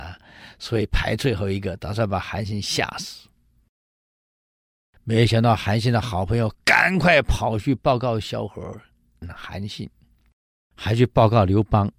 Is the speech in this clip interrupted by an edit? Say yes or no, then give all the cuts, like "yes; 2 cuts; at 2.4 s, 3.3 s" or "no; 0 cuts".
no; 0 cuts